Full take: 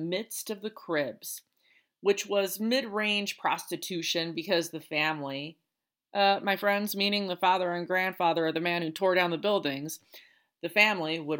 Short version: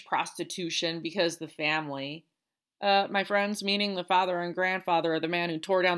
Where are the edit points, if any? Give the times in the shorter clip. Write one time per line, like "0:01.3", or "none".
none